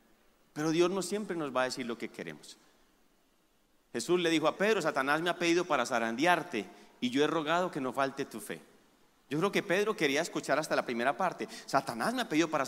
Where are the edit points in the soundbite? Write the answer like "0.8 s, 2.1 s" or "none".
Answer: 4.6 s